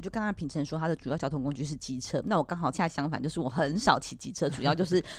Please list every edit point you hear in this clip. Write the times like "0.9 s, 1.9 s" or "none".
2.7 s